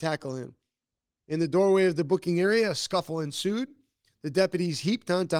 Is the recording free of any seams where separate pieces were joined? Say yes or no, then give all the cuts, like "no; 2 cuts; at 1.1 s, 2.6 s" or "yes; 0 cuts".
no; 1 cut; at 1.2 s